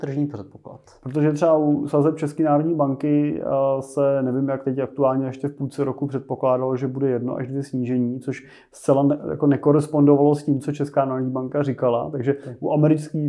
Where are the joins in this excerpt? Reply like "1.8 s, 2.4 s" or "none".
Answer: none